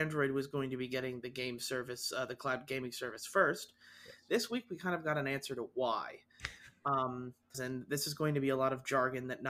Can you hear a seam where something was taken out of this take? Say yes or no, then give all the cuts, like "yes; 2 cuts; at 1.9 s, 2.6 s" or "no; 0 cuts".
yes; 1 cut; at 7.5 s